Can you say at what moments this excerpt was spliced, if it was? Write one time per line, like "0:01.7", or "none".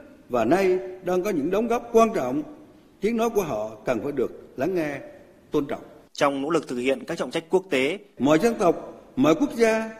0:06.1
0:08.2